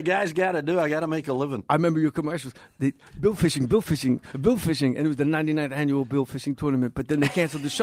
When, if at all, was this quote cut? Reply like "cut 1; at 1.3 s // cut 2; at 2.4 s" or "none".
none